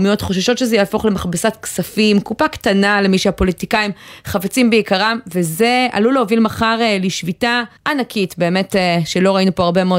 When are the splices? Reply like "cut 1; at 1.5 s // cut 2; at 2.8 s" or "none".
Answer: cut 1; at 7.8 s